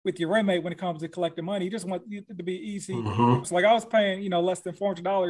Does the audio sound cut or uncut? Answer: cut